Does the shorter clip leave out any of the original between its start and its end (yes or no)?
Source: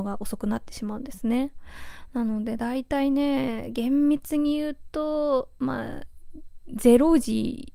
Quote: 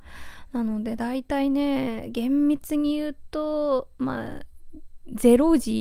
no